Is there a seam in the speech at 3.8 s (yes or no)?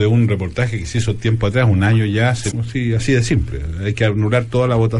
no